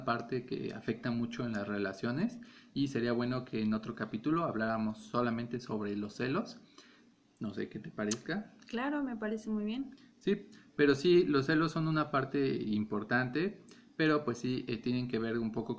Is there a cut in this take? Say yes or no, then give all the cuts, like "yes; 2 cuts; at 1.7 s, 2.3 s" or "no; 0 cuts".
no; 0 cuts